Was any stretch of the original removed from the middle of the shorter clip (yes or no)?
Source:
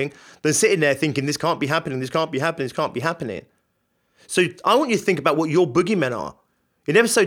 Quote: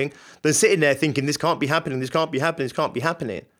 no